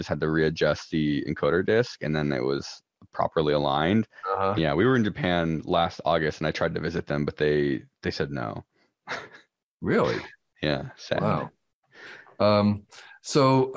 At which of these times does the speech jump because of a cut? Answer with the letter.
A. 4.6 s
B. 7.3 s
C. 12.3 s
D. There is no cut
A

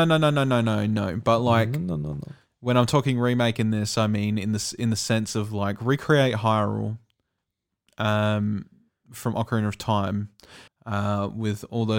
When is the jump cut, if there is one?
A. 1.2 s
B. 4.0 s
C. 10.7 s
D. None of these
C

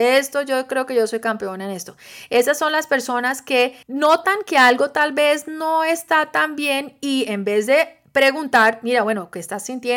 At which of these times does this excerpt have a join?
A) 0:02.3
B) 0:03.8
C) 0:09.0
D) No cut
B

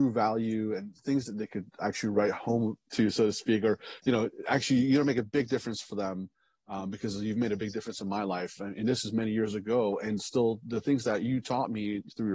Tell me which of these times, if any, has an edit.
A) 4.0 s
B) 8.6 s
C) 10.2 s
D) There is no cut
D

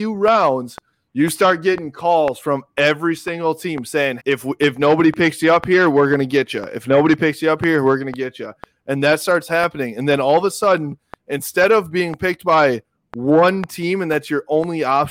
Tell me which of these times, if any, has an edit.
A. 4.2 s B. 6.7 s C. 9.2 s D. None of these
A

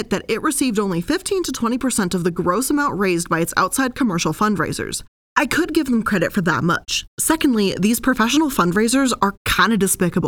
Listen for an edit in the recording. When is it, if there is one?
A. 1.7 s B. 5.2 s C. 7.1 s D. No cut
B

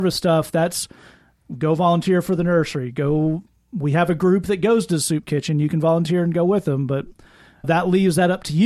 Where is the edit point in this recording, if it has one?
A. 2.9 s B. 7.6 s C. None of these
B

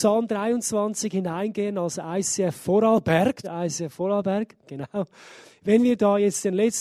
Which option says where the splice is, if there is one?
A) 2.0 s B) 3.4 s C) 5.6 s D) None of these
B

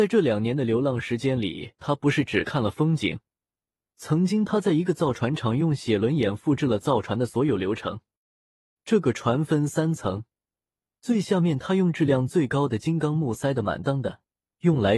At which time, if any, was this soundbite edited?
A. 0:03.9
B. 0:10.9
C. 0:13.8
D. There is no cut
C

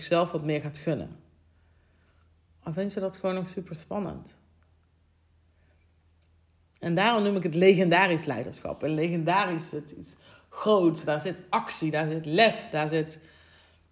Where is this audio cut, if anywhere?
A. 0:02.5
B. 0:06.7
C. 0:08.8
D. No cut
A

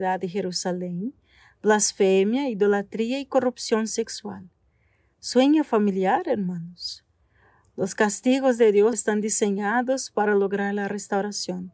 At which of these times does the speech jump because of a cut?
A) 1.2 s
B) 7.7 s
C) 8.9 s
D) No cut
C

